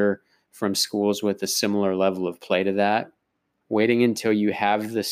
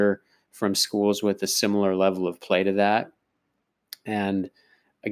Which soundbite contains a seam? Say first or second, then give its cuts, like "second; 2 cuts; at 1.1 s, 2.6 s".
first; 1 cut; at 3.6 s